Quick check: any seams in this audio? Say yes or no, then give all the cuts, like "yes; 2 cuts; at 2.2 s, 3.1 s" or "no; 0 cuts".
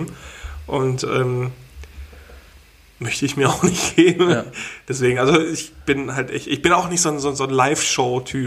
no; 0 cuts